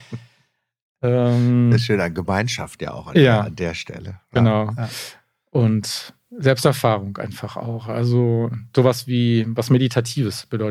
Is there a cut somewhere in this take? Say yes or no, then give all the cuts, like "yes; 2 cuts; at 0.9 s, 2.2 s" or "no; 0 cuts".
no; 0 cuts